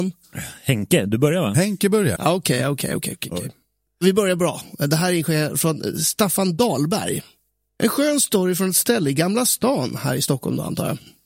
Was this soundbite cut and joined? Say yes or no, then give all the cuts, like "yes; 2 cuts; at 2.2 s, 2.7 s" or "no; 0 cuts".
yes; 2 cuts; at 2.2 s, 7.7 s